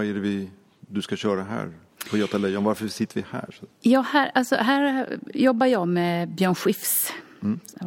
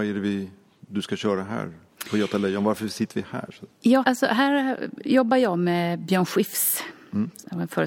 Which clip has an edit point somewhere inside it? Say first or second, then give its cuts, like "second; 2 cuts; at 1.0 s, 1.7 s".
second; 1 cut; at 4.0 s